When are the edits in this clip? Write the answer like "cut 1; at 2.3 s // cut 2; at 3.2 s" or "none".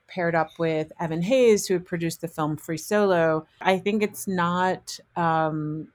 none